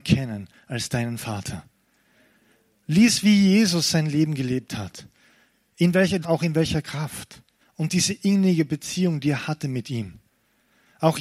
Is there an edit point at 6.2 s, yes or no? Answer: yes